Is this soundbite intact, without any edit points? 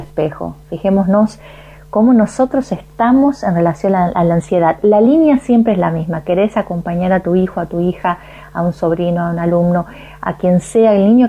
yes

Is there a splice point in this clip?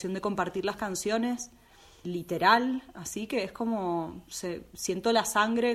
yes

